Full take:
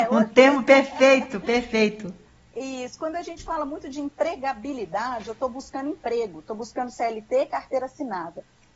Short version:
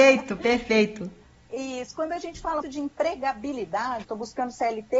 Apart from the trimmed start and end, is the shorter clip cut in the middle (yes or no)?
yes